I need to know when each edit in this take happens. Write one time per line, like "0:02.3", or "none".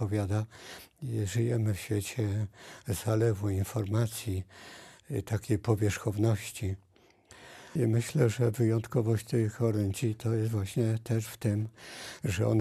0:07.8